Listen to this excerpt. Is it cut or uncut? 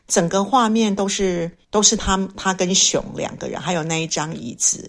cut